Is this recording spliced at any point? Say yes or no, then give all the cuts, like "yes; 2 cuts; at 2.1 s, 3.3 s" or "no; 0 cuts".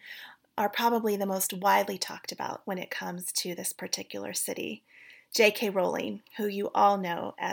no; 0 cuts